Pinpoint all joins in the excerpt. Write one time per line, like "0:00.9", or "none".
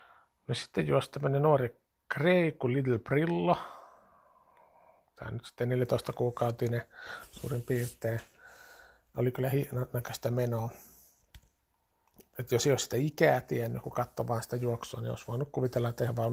none